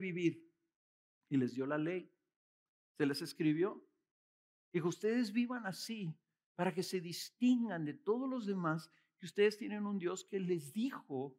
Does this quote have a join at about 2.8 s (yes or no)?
no